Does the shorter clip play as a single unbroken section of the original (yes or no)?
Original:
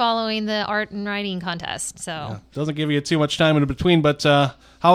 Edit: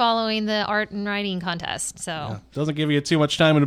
yes